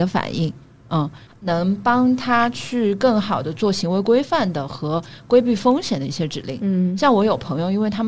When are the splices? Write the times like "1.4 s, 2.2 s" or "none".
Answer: 1.3 s